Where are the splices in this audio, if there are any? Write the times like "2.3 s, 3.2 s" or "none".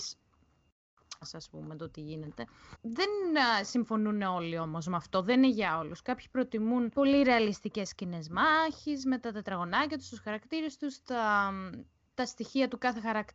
1.2 s